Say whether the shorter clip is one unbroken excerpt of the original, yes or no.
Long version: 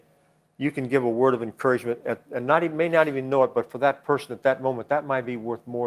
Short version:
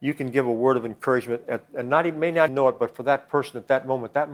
no